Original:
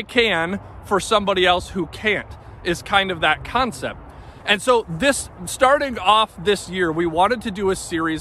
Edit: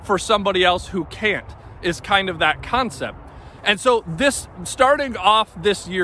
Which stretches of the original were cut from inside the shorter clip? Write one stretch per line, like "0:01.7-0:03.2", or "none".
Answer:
none